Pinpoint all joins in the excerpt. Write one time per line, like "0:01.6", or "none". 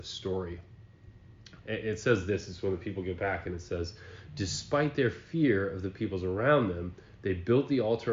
0:01.6